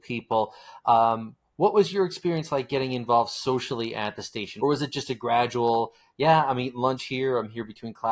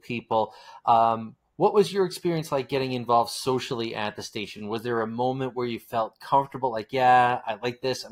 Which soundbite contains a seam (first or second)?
first